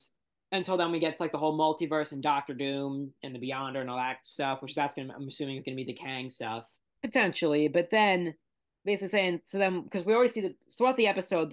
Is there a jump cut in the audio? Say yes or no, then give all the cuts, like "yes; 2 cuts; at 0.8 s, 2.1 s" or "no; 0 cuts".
yes; 1 cut; at 7.0 s